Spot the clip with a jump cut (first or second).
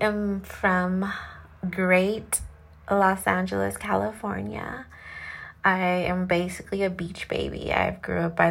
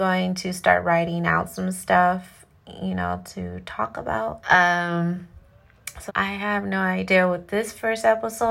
second